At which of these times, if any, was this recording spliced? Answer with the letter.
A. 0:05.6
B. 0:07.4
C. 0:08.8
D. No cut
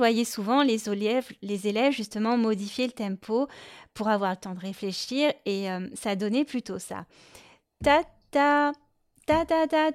D